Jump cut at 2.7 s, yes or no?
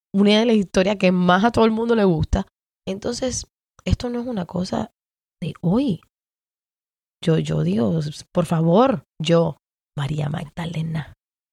yes